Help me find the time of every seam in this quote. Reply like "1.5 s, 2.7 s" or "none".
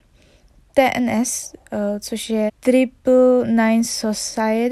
2.5 s